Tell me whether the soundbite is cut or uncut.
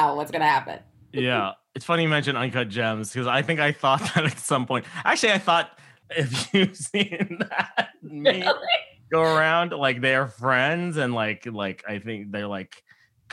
cut